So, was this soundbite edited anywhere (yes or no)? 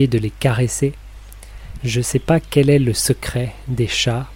yes